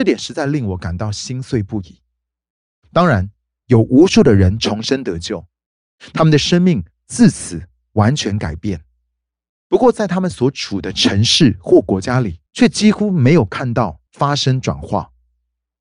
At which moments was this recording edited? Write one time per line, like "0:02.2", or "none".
0:03.6
0:12.5
0:14.1